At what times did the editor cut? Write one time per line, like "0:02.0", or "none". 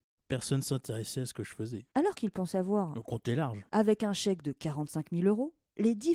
0:01.9